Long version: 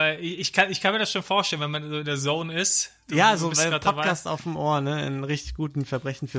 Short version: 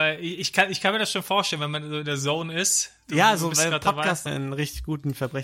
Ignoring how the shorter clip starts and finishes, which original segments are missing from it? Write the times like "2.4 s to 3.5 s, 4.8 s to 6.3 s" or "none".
4.3 s to 5.0 s